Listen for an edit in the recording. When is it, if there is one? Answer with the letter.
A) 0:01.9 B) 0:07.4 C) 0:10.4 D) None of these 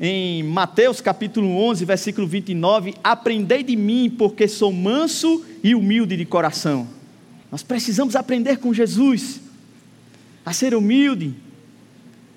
B